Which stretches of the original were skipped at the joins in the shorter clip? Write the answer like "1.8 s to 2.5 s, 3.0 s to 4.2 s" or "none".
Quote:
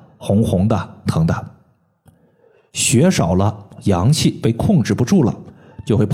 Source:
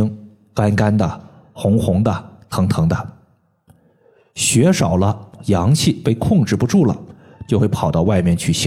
2.4 s to 2.7 s